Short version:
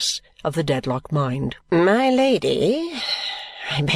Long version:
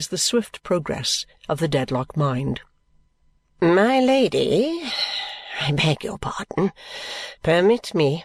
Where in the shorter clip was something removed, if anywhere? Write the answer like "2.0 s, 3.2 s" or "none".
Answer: 1.6 s